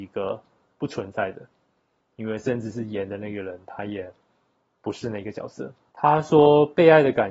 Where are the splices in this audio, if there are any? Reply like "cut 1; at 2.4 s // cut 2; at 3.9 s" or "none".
cut 1; at 5.9 s